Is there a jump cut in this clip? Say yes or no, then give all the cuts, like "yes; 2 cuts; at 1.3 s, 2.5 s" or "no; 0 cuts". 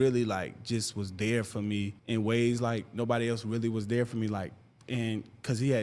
yes; 1 cut; at 2.0 s